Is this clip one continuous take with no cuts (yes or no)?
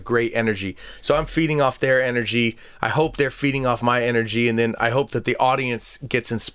yes